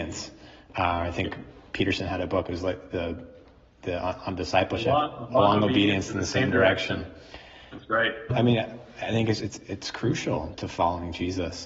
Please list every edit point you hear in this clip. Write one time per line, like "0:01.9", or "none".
0:08.3
0:09.4
0:10.5